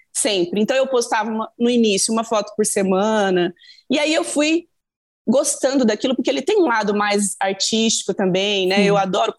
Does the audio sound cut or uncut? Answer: uncut